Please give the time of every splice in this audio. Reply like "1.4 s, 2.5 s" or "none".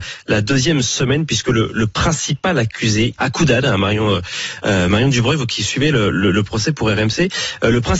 3.2 s